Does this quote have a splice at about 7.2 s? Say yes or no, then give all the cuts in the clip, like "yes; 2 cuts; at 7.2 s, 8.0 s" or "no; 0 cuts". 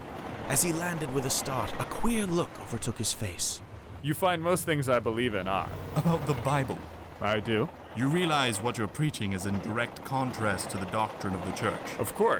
no; 1 cut; at 4.0 s